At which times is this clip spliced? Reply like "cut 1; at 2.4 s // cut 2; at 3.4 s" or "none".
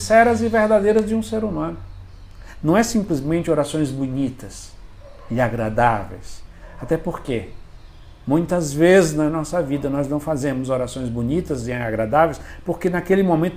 none